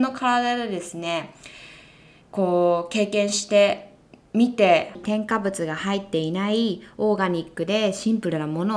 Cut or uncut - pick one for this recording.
uncut